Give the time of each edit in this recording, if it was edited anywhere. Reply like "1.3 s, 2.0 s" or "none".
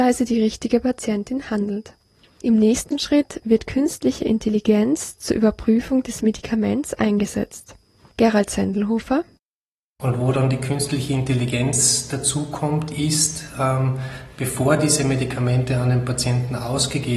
none